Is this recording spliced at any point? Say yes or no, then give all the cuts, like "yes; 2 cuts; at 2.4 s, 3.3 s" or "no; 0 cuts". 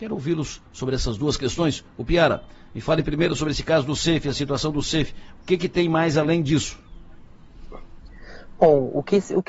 no; 0 cuts